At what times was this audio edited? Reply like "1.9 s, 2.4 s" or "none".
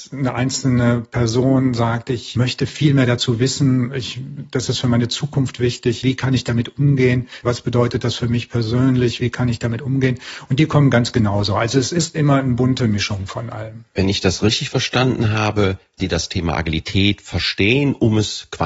6.0 s, 7.4 s, 16.0 s